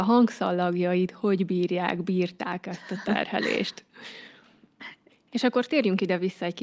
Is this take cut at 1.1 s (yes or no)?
no